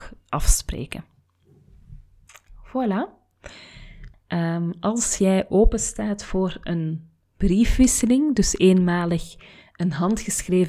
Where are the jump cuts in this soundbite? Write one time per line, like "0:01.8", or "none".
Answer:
0:04.1